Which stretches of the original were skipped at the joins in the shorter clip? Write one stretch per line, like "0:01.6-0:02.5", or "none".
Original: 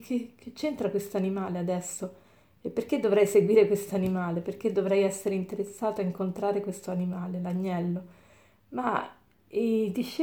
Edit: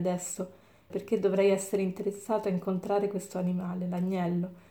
0:02.5-0:04.4